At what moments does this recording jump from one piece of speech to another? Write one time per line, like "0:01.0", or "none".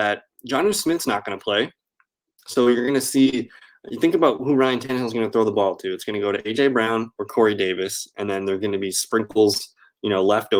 none

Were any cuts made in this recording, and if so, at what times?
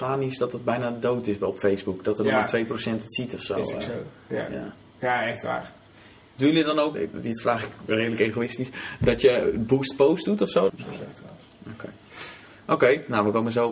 0:06.9
0:10.7

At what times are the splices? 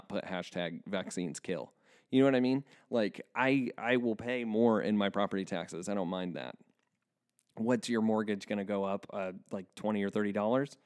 none

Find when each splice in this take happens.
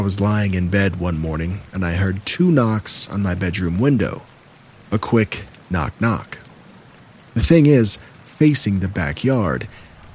0:08.2

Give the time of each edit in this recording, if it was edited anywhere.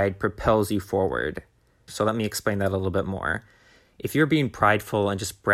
0:01.9

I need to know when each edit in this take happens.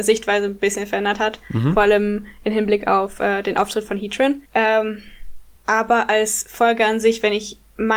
0:04.4
0:05.5

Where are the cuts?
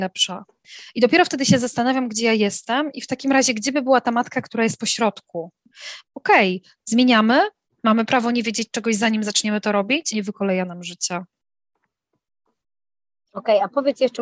0:06.0
0:07.6
0:10.1

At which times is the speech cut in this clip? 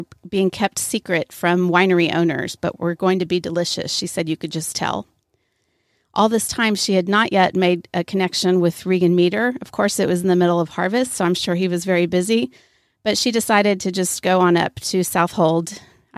none

